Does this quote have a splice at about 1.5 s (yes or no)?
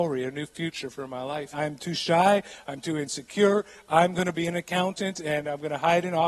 yes